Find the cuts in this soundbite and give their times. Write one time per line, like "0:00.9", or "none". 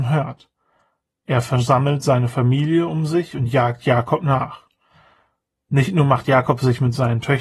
none